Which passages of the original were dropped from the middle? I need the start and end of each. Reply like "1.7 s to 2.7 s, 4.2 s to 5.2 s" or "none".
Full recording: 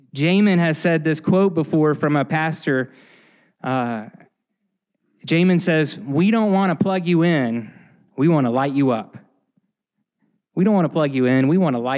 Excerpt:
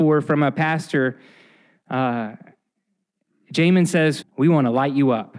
5.9 s to 8.0 s